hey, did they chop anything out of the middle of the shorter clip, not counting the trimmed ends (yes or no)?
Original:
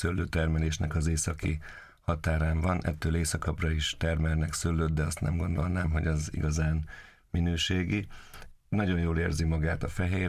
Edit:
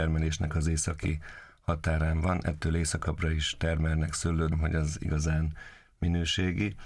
yes